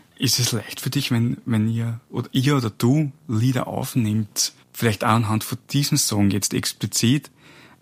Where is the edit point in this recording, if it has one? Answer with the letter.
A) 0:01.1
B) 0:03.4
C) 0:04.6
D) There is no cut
C